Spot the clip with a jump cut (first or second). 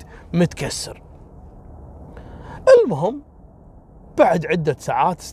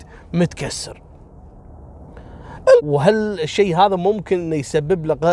second